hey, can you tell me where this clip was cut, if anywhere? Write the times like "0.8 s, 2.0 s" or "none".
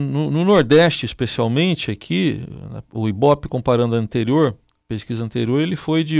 none